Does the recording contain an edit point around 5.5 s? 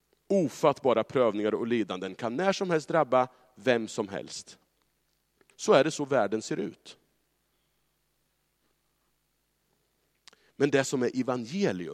yes; 1 cut; at 5.5 s

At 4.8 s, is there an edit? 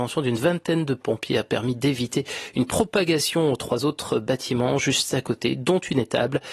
no; 0 cuts

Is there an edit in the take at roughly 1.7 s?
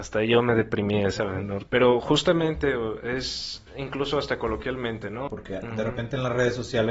yes; 2 cuts; at 1.7 s, 5.3 s

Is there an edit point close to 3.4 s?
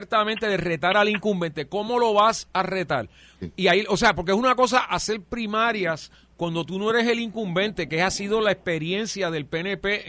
yes; 1 cut; at 3.4 s

